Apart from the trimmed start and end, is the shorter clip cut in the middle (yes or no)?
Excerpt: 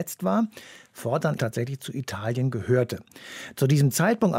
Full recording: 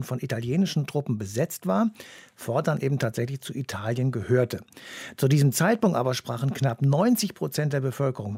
yes